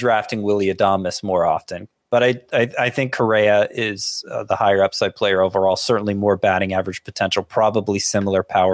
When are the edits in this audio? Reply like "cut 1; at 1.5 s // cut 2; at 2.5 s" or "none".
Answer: none